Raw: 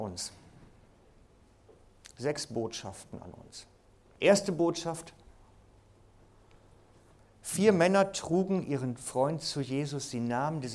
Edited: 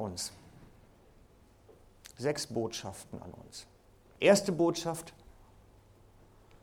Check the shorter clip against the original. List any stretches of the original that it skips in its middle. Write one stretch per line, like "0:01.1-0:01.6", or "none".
none